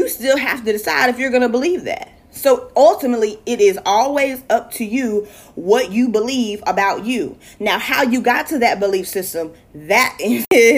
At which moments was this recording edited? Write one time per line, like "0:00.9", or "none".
none